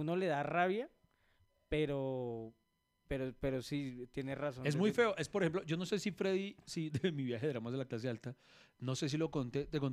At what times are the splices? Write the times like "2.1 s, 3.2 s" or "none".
6.9 s